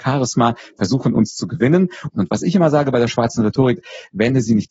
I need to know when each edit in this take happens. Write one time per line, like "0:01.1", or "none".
0:02.1